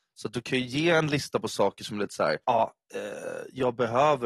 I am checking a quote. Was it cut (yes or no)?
yes